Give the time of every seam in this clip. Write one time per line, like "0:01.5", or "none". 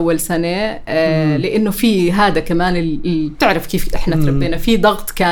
none